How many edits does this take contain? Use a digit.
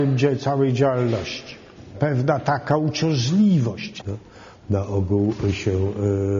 2